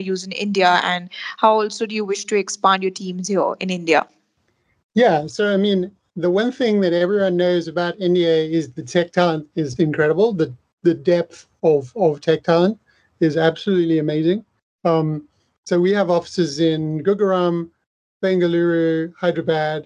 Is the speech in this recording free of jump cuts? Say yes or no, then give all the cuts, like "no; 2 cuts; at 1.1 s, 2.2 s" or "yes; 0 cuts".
no; 1 cut; at 9.8 s